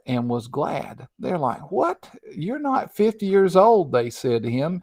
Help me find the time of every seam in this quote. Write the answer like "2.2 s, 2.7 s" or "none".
1.1 s